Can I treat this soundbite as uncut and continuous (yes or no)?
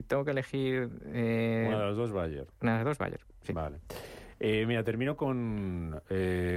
yes